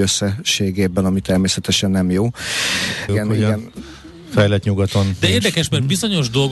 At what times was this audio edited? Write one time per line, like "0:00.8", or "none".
0:03.1